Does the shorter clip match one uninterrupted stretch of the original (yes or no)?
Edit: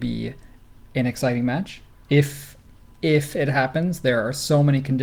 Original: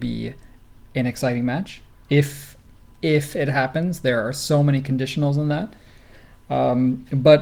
yes